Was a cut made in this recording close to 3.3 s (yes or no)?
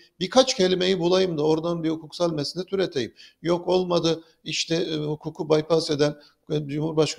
no